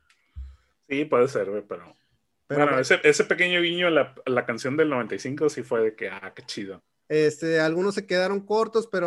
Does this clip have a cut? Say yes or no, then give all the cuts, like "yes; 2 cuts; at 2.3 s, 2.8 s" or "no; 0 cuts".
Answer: yes; 1 cut; at 7.1 s